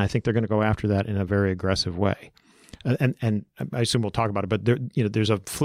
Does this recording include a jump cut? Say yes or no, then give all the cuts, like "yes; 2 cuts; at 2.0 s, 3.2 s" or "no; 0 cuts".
no; 0 cuts